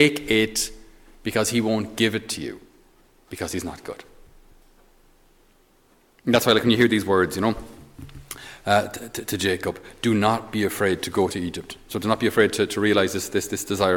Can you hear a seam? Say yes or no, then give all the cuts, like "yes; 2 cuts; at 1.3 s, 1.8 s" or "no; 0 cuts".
no; 0 cuts